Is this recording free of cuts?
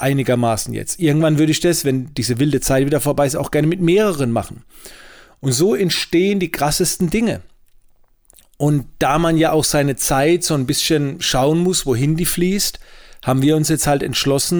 yes; 0 cuts

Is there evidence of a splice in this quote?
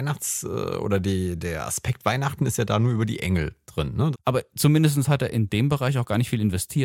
yes; 1 cut; at 4.1 s

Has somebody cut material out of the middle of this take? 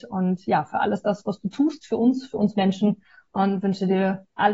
no; 0 cuts

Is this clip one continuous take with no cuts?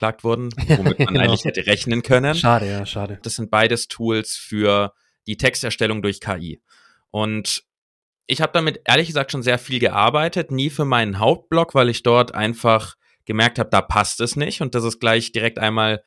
no; 1 cut; at 3.2 s

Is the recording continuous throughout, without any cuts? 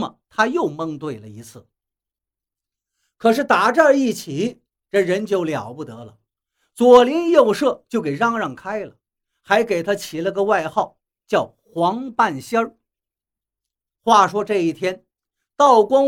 yes; 0 cuts

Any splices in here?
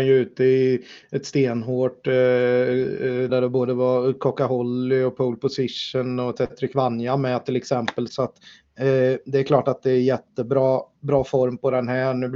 yes; 2 cuts; at 3.3 s, 8.1 s

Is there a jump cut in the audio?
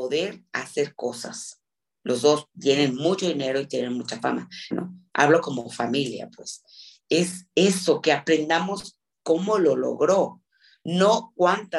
yes; 2 cuts; at 4.7 s, 7.0 s

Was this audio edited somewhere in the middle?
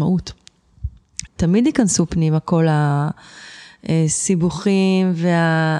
yes; 1 cut; at 1.3 s

